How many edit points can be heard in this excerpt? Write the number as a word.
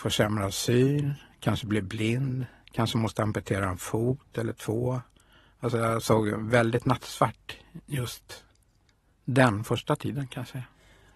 zero